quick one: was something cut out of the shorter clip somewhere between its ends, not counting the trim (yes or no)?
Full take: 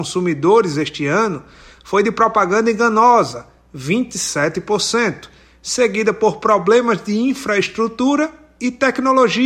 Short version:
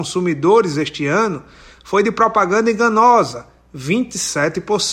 no